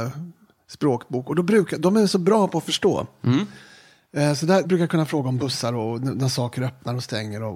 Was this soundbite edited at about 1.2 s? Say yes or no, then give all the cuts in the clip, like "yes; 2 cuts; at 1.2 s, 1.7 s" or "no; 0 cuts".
no; 1 cut; at 4.6 s